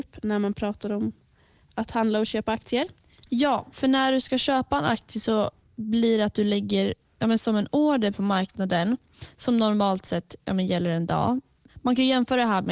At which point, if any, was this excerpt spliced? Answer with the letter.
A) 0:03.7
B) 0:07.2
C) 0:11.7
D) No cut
C